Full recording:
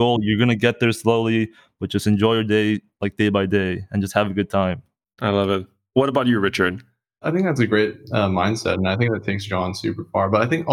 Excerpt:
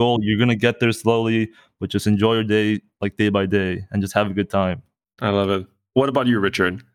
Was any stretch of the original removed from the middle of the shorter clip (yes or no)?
no